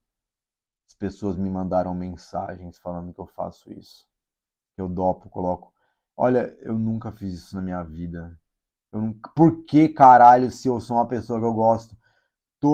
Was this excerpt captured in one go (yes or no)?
yes